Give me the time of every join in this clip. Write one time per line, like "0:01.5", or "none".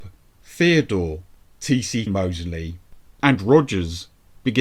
0:02.1
0:03.2